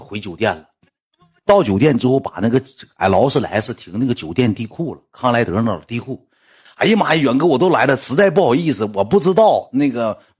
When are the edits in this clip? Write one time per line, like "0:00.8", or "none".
0:06.7